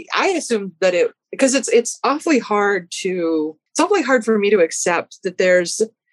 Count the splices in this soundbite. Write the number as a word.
one